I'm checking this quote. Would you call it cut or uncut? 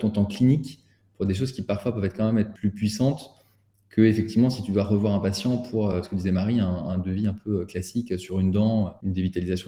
uncut